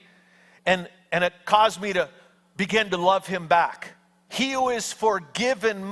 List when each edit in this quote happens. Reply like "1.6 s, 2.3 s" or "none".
4.3 s